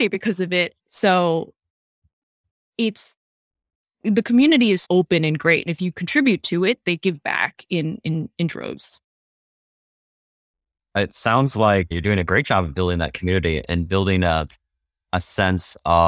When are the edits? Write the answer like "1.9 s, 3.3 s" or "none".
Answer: 4.8 s, 11.9 s